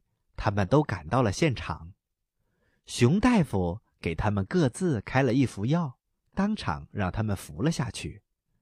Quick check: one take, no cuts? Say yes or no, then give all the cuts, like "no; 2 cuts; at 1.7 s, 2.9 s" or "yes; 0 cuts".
yes; 0 cuts